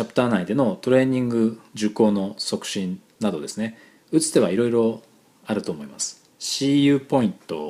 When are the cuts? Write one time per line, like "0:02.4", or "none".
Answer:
0:06.3